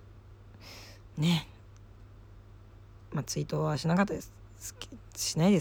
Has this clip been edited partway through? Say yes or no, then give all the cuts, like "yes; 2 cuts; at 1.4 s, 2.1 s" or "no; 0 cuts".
no; 0 cuts